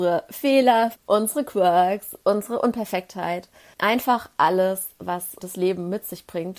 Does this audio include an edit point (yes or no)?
yes